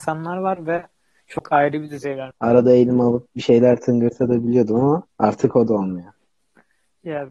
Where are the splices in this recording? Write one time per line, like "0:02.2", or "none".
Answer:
0:02.3
0:05.1